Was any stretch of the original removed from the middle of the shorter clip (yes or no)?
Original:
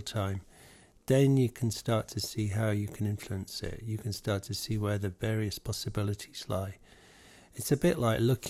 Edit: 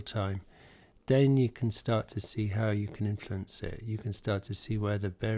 no